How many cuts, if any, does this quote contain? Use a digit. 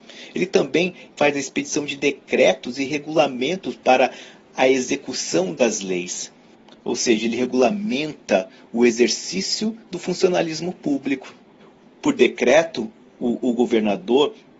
0